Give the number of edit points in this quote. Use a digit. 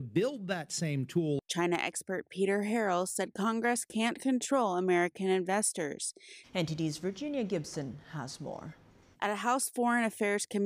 2